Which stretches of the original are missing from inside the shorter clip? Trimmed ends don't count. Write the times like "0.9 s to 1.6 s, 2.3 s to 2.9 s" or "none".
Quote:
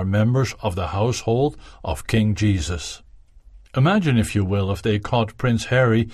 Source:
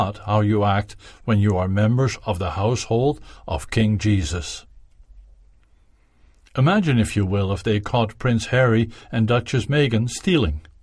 5.3 s to 6.5 s